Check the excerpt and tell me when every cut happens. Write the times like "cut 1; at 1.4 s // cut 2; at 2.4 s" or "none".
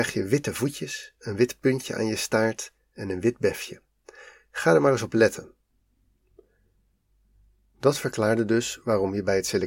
cut 1; at 1.2 s